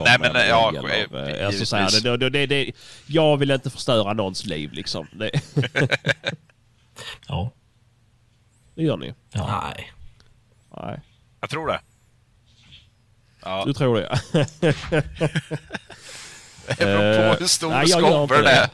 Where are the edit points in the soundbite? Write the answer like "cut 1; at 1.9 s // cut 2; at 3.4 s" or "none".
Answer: cut 1; at 7.2 s // cut 2; at 11.3 s